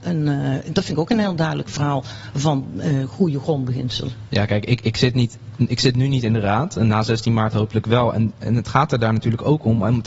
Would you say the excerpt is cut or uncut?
uncut